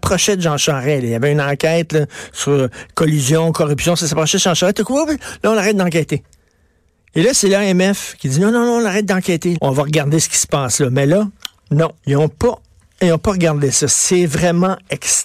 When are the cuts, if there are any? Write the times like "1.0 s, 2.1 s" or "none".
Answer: 9.5 s, 12.0 s

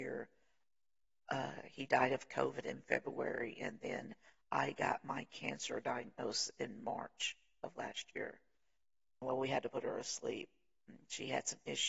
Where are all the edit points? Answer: 9.2 s

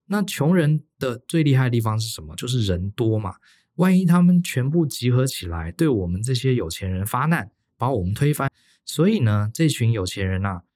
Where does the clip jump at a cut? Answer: 8.5 s

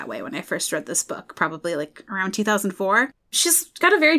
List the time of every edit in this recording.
none

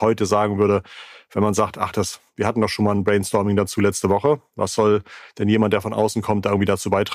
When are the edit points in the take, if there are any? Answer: none

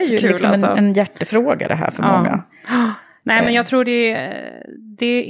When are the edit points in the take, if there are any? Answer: none

